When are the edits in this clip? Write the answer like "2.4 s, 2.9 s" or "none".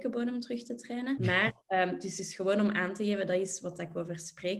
1.2 s